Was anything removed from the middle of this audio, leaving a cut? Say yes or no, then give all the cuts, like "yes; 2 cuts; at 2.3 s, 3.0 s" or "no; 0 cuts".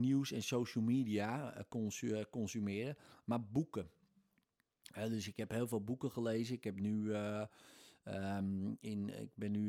no; 0 cuts